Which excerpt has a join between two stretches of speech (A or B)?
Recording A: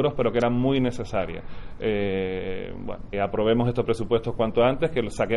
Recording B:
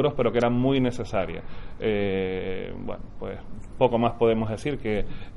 A